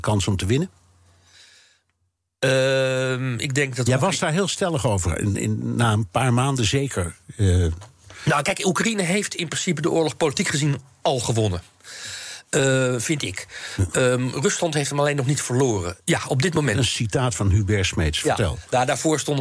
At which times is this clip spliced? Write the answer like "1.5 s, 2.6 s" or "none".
16.0 s